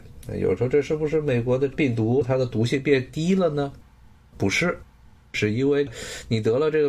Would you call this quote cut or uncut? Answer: uncut